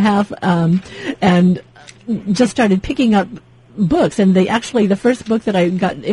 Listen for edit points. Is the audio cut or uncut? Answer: uncut